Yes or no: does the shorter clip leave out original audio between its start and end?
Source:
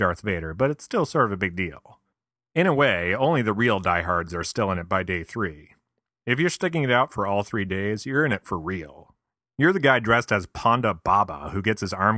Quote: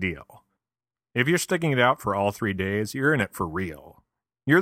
yes